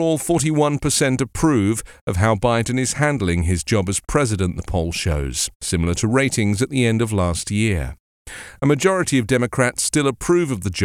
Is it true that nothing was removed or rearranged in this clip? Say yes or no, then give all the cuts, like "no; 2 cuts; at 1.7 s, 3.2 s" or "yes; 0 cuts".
yes; 0 cuts